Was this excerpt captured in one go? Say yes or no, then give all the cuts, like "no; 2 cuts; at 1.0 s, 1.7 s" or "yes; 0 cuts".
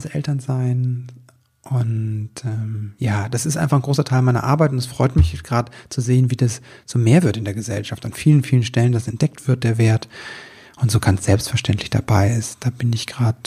yes; 0 cuts